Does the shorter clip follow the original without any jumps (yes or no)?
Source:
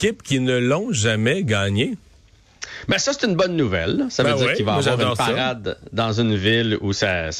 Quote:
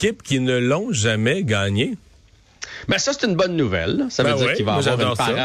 yes